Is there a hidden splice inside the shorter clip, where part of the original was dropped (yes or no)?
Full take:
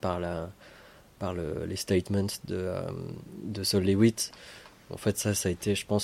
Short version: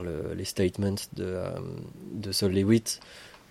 no